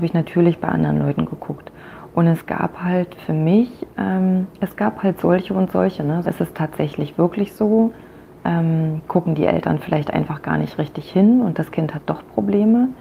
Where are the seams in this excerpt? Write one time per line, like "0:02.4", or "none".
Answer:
0:06.2